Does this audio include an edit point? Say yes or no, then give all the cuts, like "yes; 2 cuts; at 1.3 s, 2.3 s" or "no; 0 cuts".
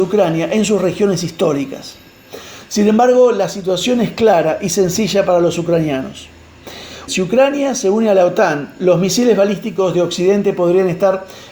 yes; 1 cut; at 7.1 s